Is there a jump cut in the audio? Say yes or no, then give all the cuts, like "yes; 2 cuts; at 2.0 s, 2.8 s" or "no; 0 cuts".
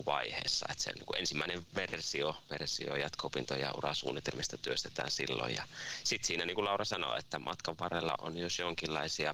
yes; 2 cuts; at 2.5 s, 8.2 s